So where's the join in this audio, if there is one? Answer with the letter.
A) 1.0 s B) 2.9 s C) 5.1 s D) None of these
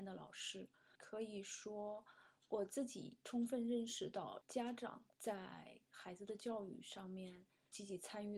C